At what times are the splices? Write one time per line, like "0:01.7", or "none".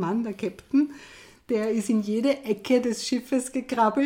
none

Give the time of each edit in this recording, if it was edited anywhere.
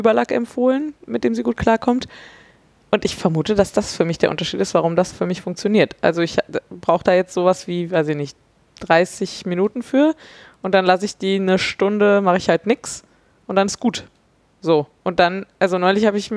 0:05.1

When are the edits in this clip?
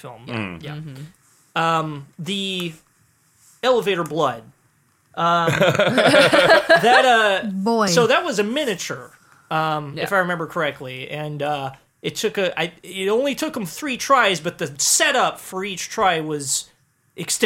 none

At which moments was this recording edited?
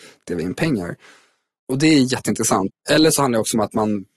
0:02.7

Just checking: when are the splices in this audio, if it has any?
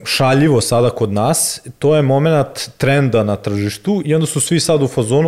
none

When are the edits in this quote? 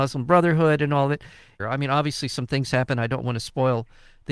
0:01.6

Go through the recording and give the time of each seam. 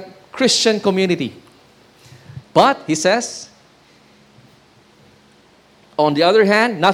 0:02.4

